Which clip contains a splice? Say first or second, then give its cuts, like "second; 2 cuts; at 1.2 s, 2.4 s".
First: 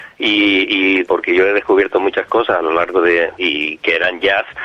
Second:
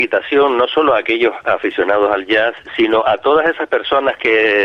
first; 2 cuts; at 1.0 s, 3.4 s